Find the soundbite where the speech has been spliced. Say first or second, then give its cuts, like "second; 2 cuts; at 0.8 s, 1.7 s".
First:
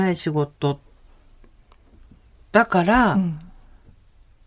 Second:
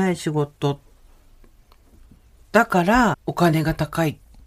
second; 1 cut; at 3.1 s